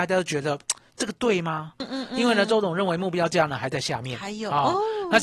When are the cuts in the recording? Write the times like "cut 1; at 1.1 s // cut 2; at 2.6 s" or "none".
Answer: cut 1; at 1.8 s